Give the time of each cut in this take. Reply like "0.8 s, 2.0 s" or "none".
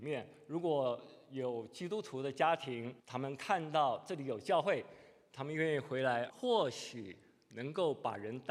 3.0 s, 6.3 s